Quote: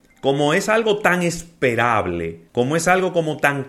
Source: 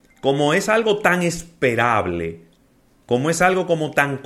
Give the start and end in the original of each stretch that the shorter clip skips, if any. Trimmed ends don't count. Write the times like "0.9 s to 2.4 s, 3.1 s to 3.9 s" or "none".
2.5 s to 3.0 s